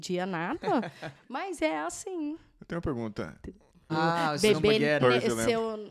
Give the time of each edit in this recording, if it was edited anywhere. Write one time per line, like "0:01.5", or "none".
0:01.1
0:03.9
0:05.0